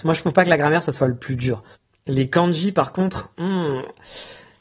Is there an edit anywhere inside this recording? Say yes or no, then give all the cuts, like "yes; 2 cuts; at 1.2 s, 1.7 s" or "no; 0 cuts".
no; 0 cuts